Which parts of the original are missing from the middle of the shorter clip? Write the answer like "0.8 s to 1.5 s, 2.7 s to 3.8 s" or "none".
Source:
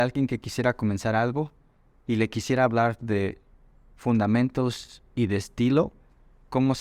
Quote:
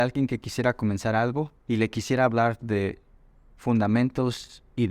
1.6 s to 2.0 s